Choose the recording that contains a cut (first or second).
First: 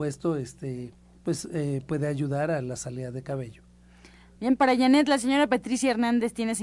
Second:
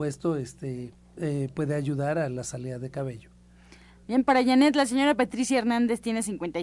second